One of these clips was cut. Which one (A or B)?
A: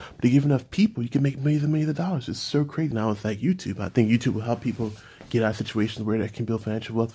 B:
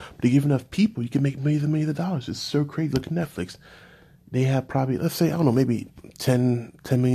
A